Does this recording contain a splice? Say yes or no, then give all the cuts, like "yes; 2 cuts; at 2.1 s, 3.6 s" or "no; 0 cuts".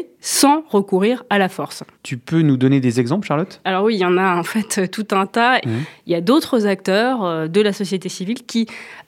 yes; 2 cuts; at 1.9 s, 5.6 s